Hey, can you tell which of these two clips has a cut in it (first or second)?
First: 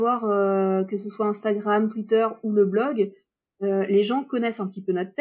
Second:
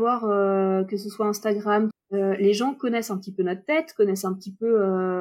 second